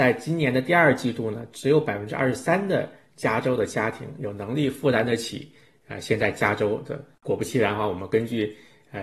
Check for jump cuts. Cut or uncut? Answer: cut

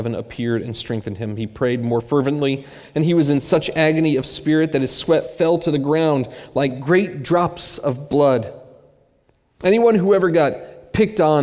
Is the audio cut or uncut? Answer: uncut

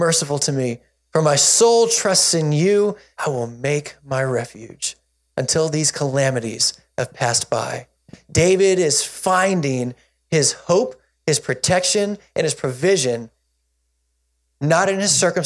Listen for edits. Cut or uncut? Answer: cut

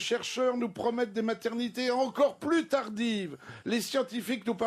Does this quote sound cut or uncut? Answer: uncut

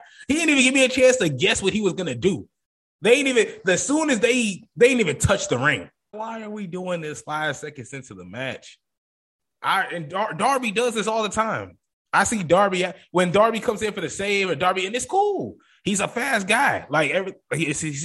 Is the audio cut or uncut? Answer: cut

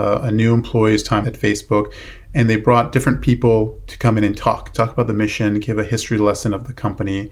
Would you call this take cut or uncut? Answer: cut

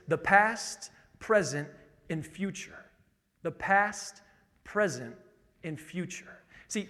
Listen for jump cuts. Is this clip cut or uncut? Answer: uncut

